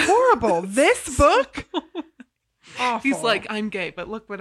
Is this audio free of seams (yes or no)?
yes